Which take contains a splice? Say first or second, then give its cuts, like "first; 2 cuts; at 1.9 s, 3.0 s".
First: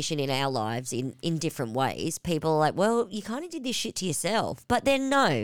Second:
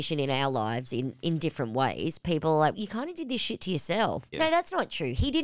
second; 2 cuts; at 2.7 s, 4.3 s